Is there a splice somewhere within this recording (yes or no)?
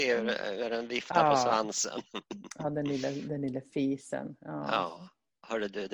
no